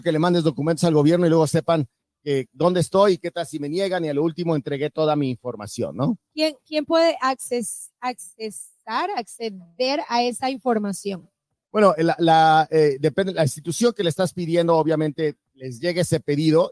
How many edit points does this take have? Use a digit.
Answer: 0